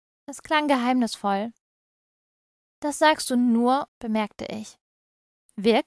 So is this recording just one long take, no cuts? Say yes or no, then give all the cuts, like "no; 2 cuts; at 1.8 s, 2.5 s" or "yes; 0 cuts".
no; 1 cut; at 3.9 s